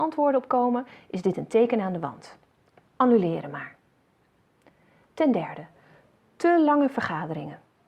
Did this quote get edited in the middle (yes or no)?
no